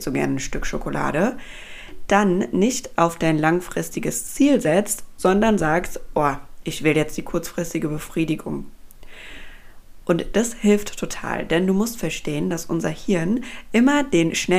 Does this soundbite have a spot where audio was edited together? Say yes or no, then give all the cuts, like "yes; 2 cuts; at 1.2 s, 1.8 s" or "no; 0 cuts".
no; 0 cuts